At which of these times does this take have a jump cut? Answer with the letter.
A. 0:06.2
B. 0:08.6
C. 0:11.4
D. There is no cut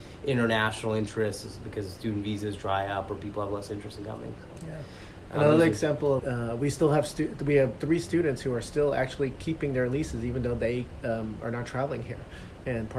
A